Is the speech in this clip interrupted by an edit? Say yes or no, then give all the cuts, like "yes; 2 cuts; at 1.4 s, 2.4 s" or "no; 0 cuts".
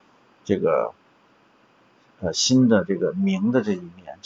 no; 0 cuts